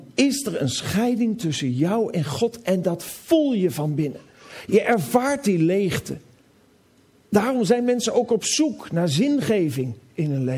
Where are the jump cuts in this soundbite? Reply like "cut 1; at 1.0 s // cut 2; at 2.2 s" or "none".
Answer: none

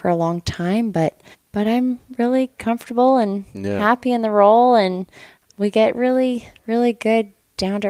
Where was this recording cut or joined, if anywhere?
cut 1; at 1.3 s

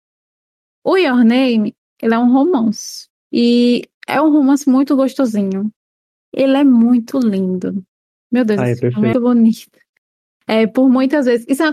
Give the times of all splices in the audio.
cut 1; at 9.1 s

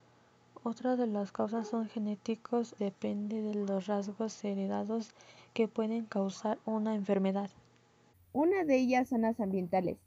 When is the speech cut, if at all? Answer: cut 1; at 2.8 s // cut 2; at 8.1 s

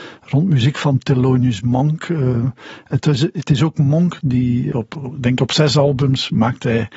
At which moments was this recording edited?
cut 1; at 4.7 s

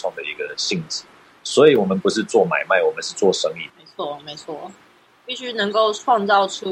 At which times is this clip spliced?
cut 1; at 3.7 s

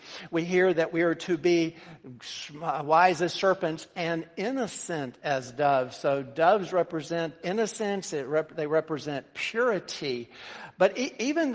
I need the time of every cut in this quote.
cut 1; at 7.4 s

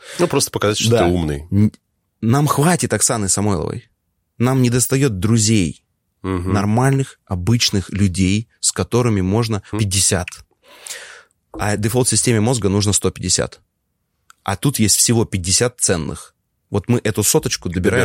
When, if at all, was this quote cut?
cut 1; at 9.7 s

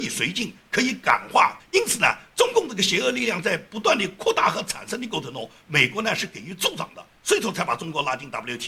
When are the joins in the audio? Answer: cut 1; at 1.6 s

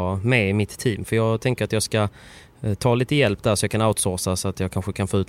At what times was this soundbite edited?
none

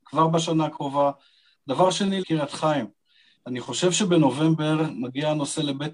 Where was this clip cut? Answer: cut 1; at 2.2 s

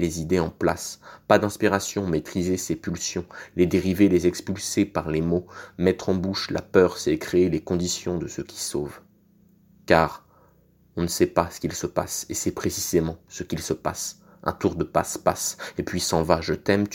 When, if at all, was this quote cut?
none

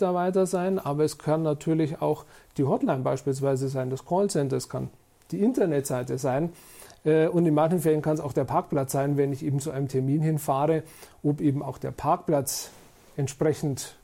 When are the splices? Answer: none

